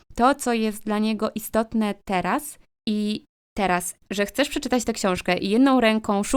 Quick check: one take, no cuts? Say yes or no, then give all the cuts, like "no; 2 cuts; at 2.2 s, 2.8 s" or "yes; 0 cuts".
no; 2 cuts; at 2.7 s, 4.0 s